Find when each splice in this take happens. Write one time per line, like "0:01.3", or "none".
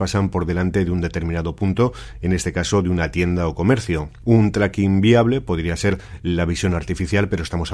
0:04.2